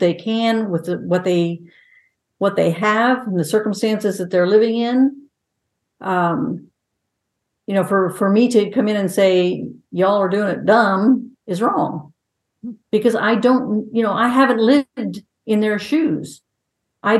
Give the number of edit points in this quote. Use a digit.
2